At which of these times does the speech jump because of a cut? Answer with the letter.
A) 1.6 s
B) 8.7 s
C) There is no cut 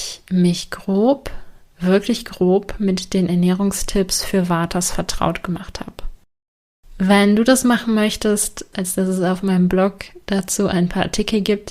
B